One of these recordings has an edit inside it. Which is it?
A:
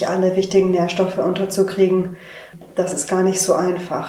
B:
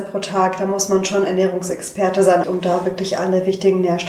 B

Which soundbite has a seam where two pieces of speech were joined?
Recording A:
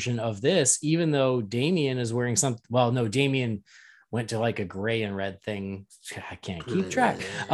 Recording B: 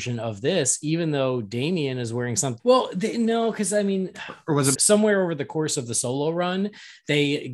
B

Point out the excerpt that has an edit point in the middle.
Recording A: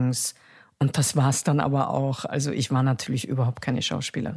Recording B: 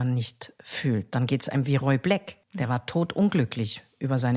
B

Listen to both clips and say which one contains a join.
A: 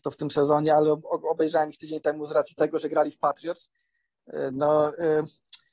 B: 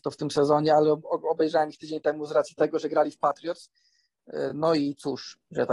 A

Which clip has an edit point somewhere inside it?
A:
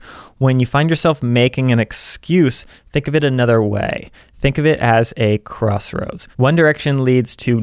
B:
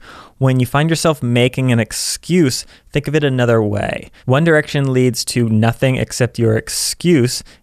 B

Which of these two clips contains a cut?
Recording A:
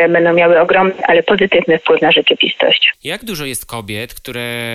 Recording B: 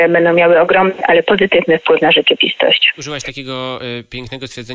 A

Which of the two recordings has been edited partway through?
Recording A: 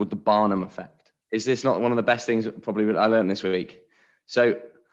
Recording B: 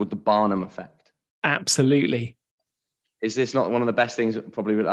A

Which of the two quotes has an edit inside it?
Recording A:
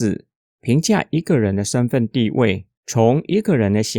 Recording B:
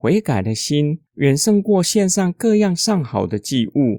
A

